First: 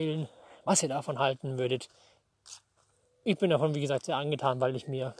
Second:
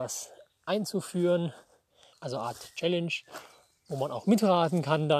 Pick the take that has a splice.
second; 1 cut; at 2.1 s

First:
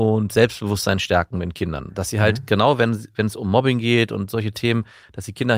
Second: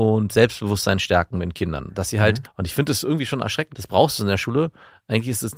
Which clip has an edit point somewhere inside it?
second; 2 cuts; at 2.4 s, 3.7 s

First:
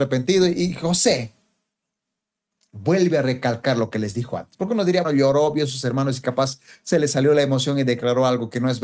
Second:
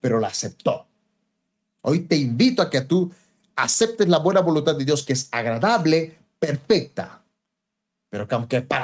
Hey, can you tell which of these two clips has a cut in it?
first; 1 cut; at 5.0 s

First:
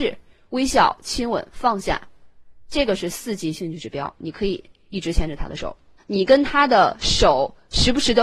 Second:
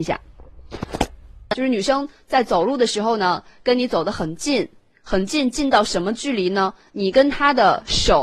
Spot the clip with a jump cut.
first; 1 cut; at 6.0 s

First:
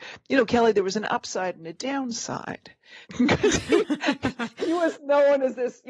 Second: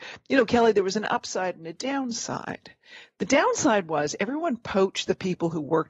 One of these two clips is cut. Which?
first; 1 cut; at 3.0 s

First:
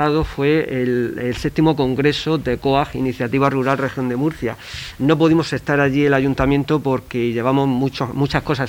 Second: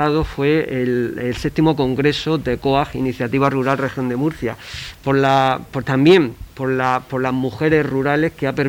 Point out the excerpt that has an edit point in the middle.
second; 1 cut; at 4.9 s

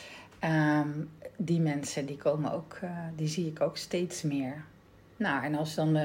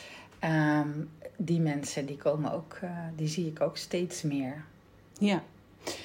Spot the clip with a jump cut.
first; 1 cut; at 5.1 s

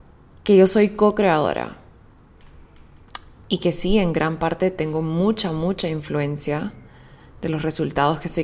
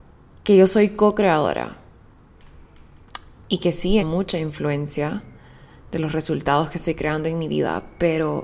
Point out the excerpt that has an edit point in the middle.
second; 1 cut; at 4.0 s

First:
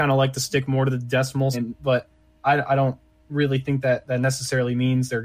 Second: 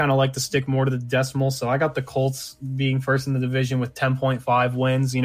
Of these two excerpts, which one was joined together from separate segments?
first; 1 cut; at 1.5 s

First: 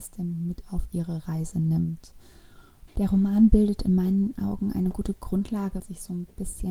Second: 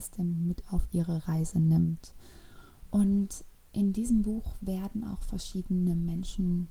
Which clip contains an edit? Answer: first; 2 cuts; at 2.9 s, 5.8 s

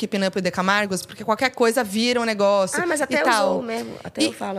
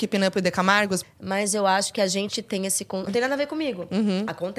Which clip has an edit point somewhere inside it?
second; 2 cuts; at 1.0 s, 3.1 s

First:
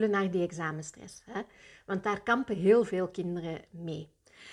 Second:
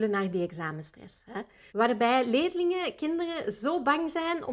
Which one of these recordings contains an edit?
second; 1 cut; at 1.7 s

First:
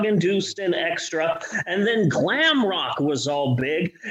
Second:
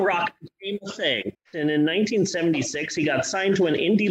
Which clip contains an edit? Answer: second; 1 cut; at 1.3 s

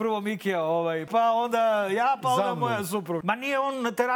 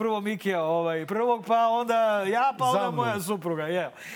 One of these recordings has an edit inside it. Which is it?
first; 2 cuts; at 1.1 s, 3.2 s

